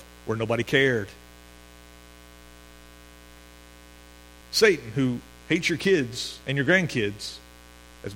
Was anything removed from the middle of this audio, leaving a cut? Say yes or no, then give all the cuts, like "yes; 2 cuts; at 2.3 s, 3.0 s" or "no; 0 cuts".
yes; 2 cuts; at 4.4 s, 6.4 s